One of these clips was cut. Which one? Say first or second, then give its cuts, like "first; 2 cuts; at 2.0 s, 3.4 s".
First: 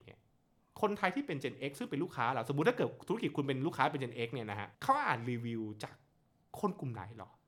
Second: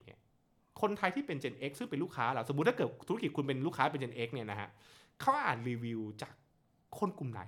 first; 1 cut; at 4.7 s